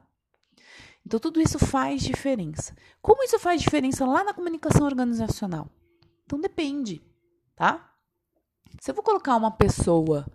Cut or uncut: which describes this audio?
cut